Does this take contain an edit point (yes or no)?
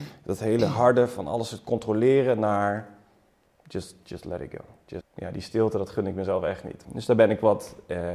yes